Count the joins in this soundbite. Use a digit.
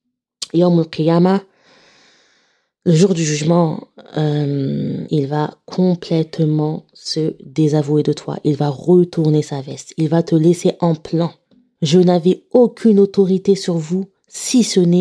2